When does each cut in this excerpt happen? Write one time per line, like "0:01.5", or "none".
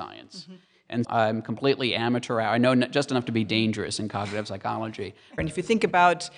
0:01.0
0:05.4